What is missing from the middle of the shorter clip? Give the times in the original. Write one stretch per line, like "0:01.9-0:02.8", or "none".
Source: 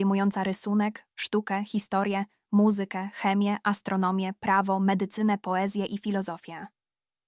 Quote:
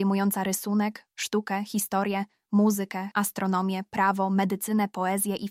0:03.1-0:03.6

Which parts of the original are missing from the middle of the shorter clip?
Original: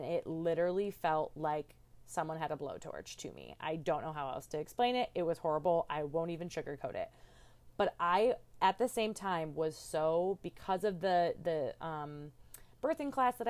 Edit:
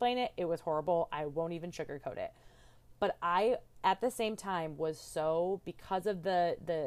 none

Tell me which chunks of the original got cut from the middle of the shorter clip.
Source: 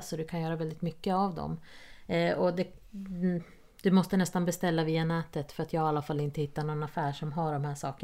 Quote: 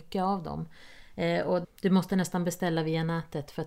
0:02.6-0:03.7

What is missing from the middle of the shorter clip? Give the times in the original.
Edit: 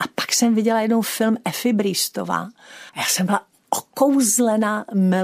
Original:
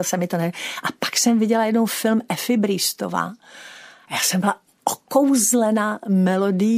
0:03.7-0:04.0

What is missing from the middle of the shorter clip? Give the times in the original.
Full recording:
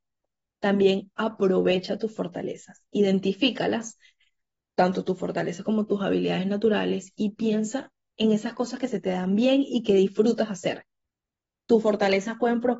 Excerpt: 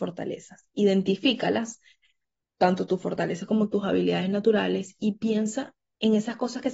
none

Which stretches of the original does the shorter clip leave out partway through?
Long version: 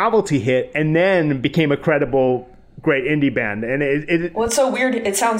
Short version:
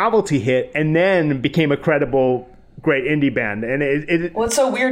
none

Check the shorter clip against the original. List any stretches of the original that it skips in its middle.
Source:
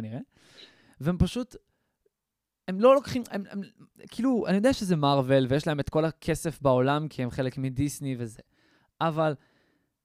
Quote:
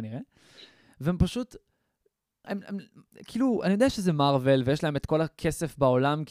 0:02.4-0:03.3

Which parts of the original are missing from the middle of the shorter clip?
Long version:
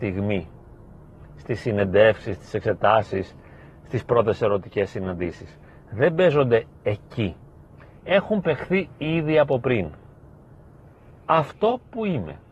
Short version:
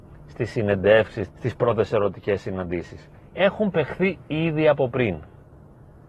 0:02.4-0:03.8
0:05.7-0:07.9

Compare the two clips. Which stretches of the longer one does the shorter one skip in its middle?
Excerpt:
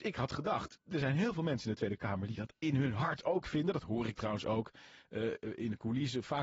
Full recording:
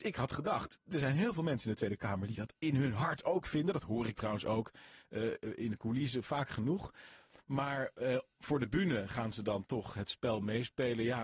none

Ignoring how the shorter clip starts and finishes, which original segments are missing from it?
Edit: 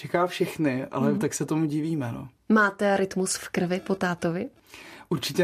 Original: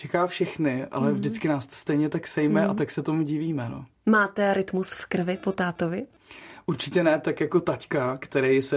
0:01.2-0:02.7

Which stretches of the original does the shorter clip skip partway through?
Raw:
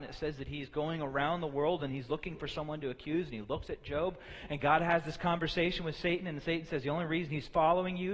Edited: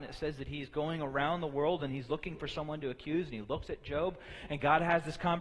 none

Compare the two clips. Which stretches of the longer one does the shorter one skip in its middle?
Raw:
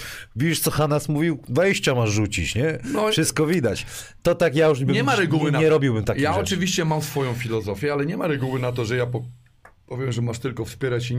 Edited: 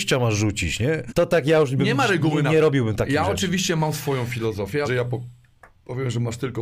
0:02.8-0:04.2
0:07.9-0:08.9

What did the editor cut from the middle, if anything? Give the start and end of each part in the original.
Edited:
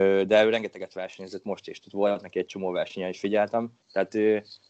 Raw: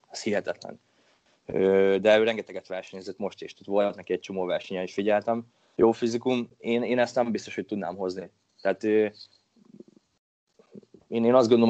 0:05.6-0:08.5

